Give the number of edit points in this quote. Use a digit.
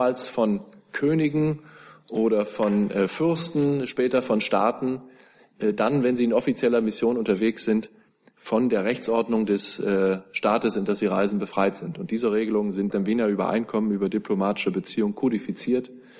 1